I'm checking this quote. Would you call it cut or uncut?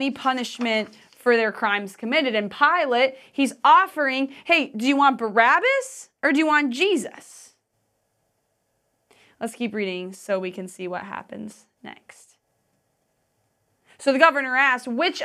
uncut